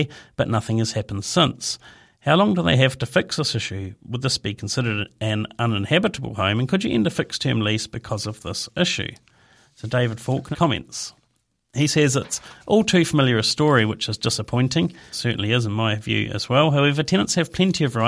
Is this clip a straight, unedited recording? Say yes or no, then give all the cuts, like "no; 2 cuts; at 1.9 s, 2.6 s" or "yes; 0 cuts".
no; 2 cuts; at 10.5 s, 15.1 s